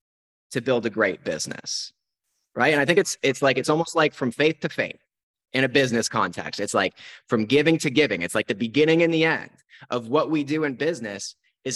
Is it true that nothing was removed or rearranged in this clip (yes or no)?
yes